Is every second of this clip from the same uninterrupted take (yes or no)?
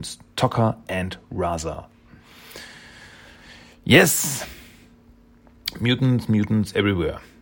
yes